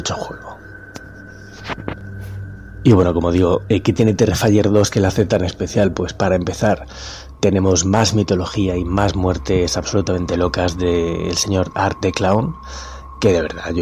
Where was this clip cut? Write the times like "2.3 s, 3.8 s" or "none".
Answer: none